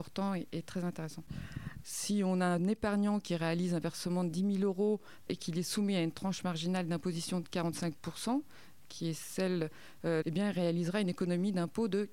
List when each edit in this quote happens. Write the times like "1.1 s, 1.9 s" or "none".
1.8 s, 5.3 s, 10.2 s